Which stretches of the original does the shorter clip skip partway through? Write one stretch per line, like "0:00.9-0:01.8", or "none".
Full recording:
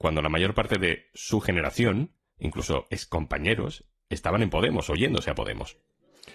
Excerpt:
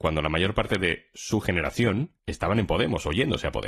0:02.2-0:04.0